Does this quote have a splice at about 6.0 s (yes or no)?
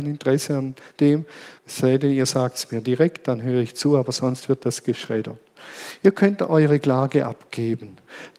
no